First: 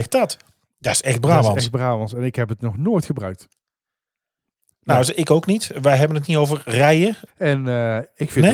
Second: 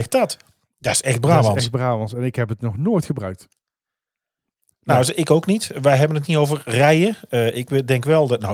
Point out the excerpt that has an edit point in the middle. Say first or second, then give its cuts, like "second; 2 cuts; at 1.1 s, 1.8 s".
first; 1 cut; at 7.3 s